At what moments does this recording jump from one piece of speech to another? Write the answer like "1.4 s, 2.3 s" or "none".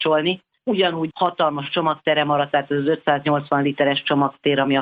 none